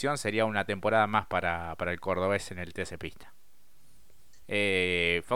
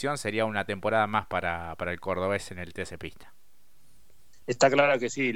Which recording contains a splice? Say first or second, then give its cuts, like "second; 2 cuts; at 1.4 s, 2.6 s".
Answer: first; 1 cut; at 4.4 s